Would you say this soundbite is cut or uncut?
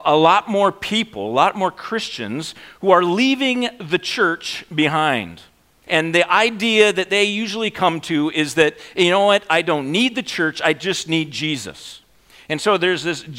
cut